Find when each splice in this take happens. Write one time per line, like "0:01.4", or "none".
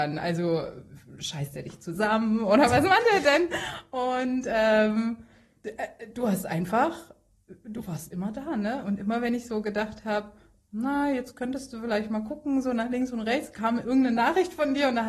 none